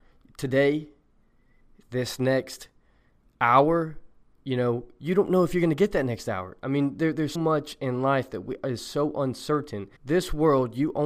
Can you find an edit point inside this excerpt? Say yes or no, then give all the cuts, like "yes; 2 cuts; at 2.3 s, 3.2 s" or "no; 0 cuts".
yes; 2 cuts; at 7.3 s, 10.0 s